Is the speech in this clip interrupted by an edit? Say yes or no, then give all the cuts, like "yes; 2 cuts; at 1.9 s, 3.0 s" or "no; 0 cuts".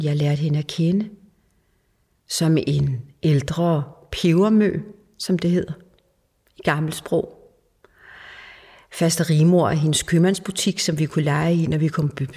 no; 0 cuts